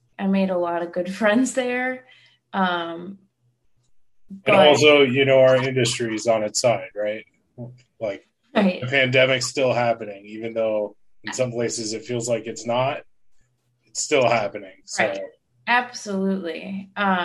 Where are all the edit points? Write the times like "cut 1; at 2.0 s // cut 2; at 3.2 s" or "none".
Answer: none